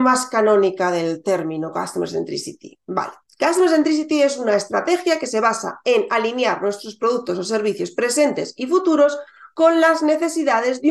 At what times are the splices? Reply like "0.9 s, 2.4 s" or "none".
none